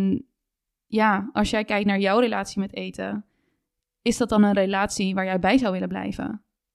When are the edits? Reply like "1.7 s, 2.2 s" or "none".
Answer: none

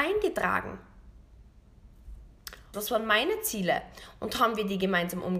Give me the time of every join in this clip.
2.7 s

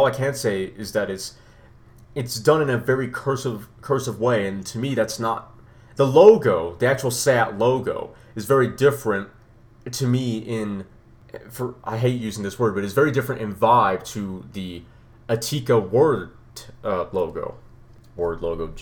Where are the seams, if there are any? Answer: none

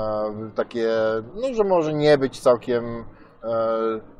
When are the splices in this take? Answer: 1.3 s

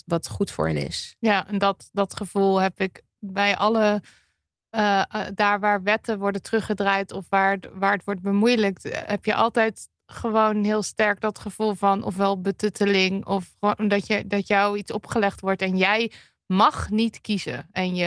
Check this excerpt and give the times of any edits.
none

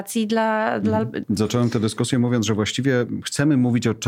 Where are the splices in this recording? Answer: 1.2 s

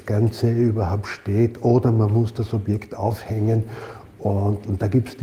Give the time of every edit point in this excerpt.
none

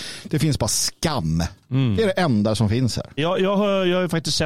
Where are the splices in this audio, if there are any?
3.2 s

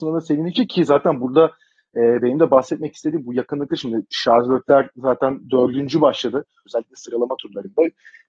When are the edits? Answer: 6.7 s

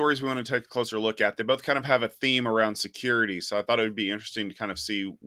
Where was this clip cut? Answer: none

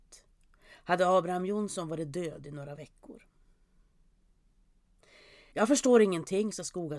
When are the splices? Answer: 5.5 s

